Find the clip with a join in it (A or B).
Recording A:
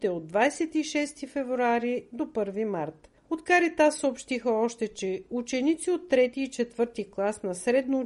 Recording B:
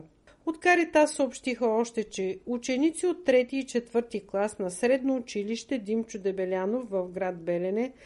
A